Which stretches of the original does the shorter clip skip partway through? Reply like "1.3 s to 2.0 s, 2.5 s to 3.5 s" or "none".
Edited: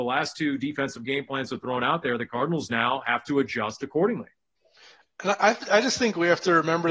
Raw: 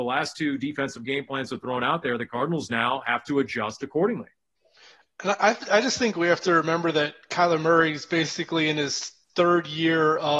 none